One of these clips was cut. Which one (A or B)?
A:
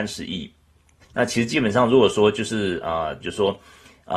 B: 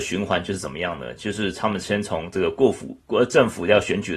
A